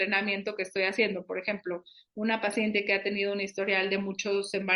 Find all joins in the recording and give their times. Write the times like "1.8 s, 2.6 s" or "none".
none